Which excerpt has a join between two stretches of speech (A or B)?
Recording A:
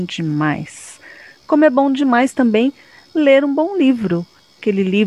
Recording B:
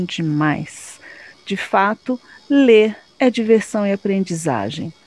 B